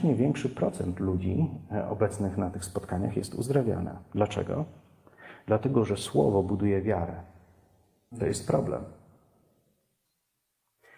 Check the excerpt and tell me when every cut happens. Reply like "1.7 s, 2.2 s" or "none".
8.1 s